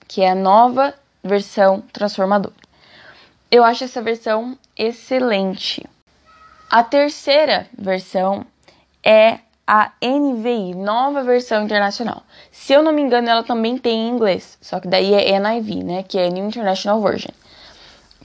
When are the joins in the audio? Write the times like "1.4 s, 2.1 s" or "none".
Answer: none